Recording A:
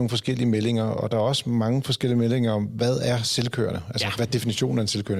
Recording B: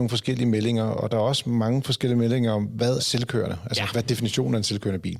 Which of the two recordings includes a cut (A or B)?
B